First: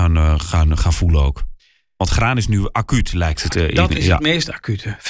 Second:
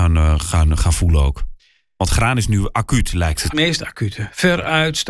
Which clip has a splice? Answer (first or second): second